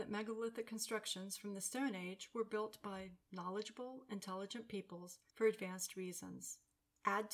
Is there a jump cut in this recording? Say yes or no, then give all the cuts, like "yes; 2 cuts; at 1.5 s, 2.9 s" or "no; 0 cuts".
no; 0 cuts